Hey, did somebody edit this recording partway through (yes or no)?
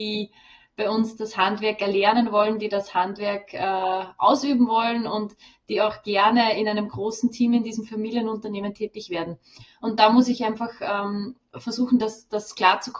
no